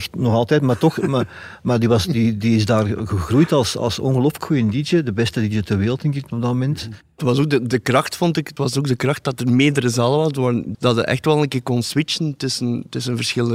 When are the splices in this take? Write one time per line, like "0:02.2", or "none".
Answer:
0:08.6
0:10.7